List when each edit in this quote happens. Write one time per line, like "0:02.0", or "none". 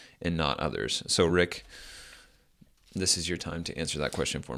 none

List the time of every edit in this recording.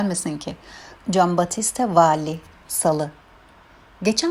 0:01.0
0:02.6

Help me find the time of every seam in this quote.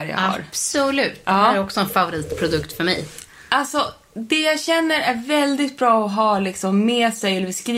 none

